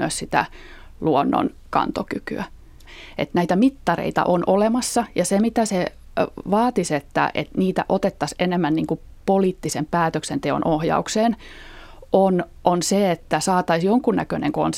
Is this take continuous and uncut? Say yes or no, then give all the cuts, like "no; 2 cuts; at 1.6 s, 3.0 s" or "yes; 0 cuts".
yes; 0 cuts